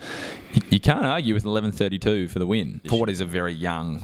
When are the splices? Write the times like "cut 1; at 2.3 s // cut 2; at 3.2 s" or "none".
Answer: cut 1; at 2.8 s